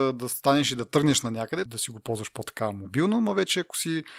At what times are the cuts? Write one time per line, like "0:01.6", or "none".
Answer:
0:01.7